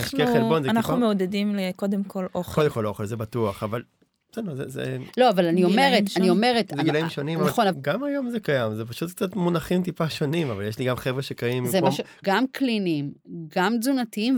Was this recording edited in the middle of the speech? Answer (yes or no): yes